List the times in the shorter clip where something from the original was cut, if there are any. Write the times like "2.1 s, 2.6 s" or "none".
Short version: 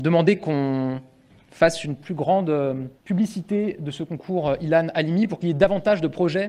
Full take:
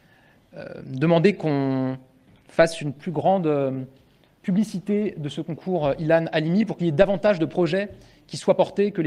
2.9 s